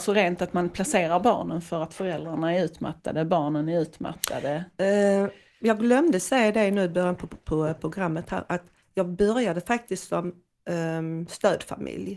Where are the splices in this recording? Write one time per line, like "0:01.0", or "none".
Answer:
none

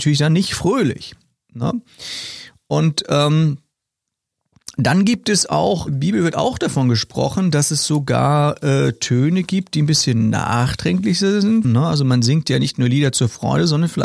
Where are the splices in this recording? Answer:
0:05.9
0:11.6

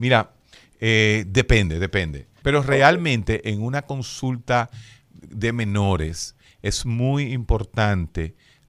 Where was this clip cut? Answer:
0:02.4

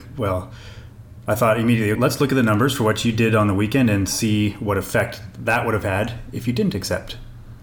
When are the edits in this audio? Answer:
0:02.0

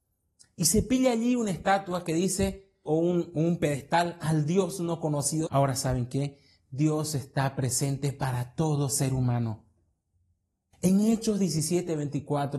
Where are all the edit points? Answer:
0:02.9
0:05.5
0:10.7

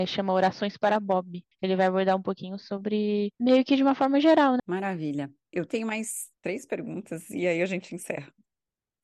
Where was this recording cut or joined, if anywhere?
0:01.5
0:04.6
0:06.4

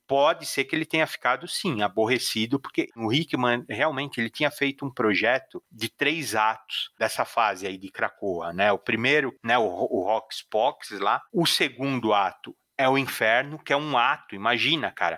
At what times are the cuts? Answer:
none

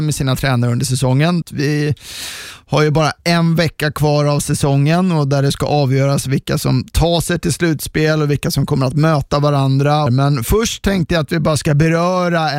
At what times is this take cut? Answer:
0:01.4
0:10.1

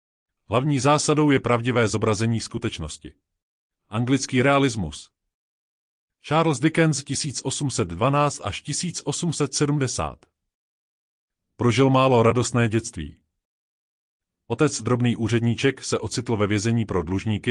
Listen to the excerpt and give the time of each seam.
0:03.7

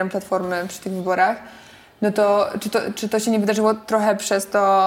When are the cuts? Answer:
none

